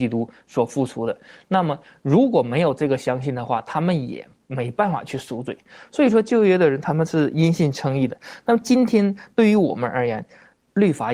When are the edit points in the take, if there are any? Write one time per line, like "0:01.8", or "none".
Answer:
none